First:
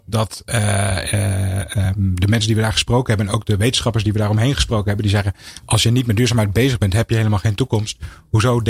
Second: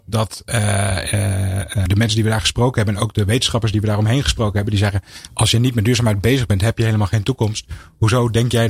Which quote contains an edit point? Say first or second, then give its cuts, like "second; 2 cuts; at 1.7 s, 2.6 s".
second; 1 cut; at 1.9 s